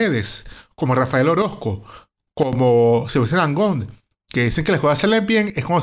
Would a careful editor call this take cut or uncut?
uncut